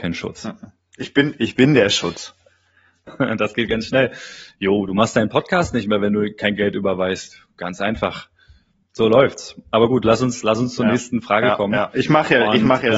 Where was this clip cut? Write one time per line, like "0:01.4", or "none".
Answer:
0:03.1